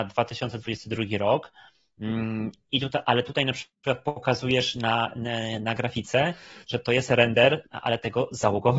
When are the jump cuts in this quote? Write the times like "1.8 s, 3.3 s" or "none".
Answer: none